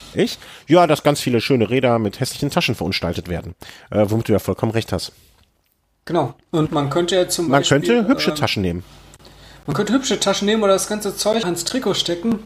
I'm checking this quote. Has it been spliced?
yes; 2 cuts; at 6.7 s, 11.4 s

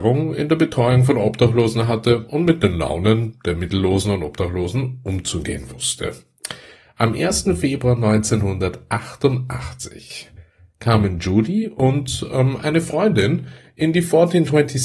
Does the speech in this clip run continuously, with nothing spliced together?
yes; 0 cuts

